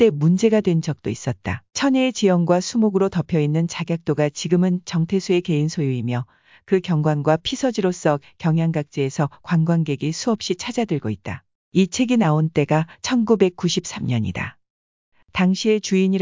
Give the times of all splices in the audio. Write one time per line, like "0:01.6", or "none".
0:01.7
0:11.7